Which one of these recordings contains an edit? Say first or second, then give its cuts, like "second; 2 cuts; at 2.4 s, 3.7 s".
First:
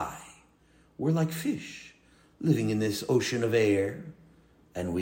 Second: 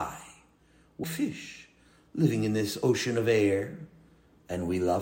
second; 1 cut; at 1.0 s